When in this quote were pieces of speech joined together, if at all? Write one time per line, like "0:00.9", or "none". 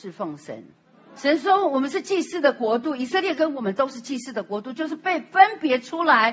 0:01.1
0:03.3